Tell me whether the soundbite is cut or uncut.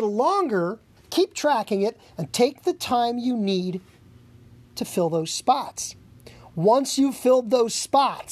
cut